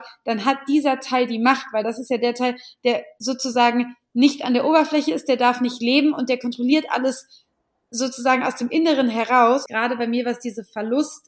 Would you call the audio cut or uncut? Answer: cut